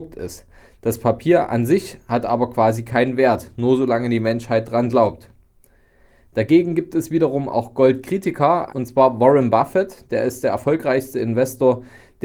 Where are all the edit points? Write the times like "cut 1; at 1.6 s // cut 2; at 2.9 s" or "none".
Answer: cut 1; at 8.7 s